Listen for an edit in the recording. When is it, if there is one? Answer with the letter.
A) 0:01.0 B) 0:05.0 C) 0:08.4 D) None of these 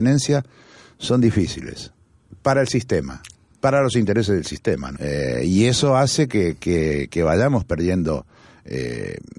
B